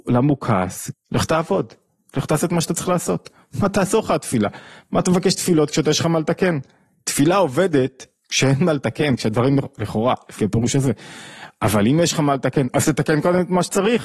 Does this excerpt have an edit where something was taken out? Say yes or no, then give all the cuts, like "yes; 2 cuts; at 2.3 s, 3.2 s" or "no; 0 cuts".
yes; 1 cut; at 0.9 s